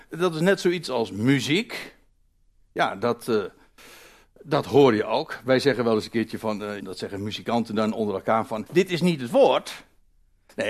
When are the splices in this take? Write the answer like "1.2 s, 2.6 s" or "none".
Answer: 6.8 s, 8.7 s